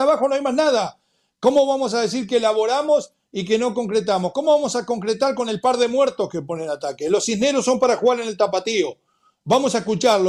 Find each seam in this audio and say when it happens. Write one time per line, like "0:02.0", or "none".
none